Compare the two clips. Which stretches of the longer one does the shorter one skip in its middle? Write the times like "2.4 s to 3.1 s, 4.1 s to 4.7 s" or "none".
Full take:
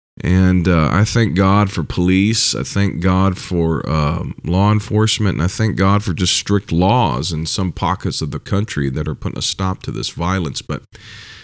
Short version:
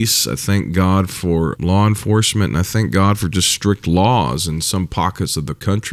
3.8 s to 4.4 s